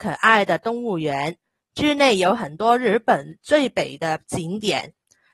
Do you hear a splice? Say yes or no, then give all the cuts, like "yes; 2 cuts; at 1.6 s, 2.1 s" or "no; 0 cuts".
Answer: no; 0 cuts